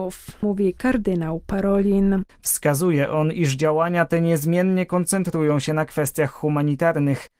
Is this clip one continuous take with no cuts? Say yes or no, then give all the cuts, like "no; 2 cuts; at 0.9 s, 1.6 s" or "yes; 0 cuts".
no; 1 cut; at 2.3 s